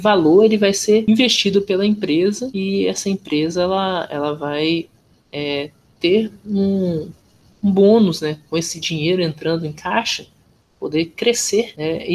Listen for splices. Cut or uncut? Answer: uncut